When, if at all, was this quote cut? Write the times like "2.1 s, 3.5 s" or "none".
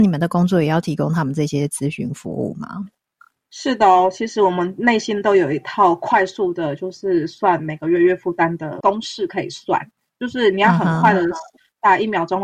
none